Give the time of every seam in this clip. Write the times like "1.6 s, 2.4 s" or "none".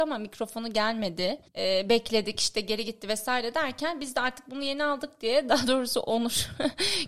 1.5 s

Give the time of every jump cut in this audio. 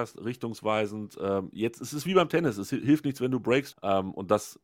3.7 s

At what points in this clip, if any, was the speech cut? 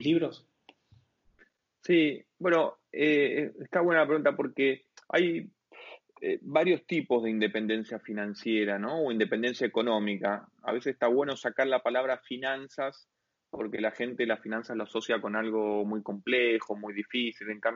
none

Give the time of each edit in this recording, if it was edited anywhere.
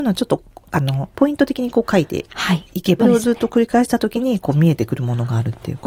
1.1 s, 3.0 s

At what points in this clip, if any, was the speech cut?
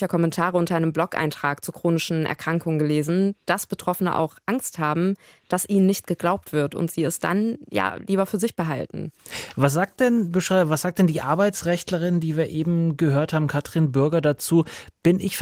none

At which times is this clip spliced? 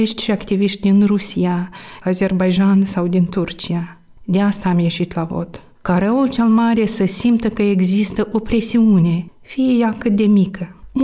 2.0 s

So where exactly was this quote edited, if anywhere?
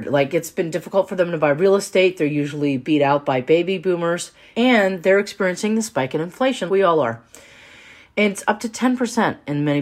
6.7 s

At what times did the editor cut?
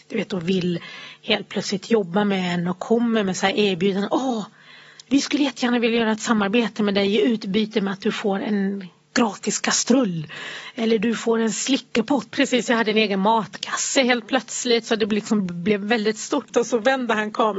12.3 s, 16.5 s

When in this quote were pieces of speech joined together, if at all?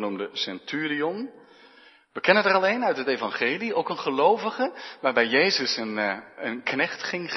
none

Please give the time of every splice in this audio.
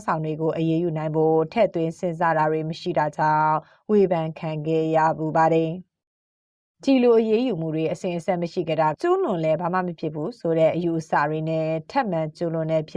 8.9 s

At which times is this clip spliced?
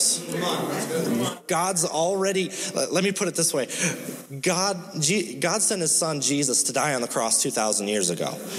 none

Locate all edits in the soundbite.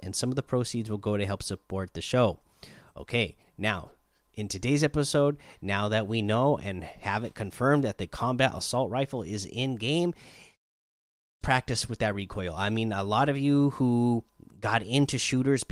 11.4 s

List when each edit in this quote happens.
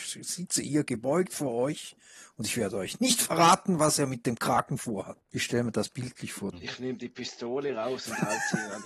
5.2 s, 6.5 s

